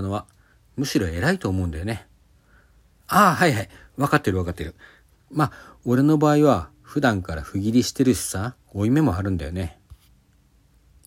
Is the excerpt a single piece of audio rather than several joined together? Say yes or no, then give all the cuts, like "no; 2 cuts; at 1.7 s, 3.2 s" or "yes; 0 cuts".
no; 2 cuts; at 5.1 s, 8.6 s